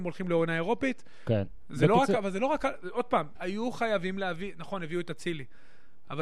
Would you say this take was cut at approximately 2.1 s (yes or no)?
no